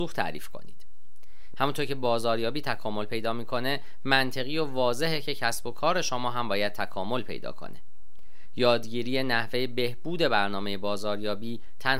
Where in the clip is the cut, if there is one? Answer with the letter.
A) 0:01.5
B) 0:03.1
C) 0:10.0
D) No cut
A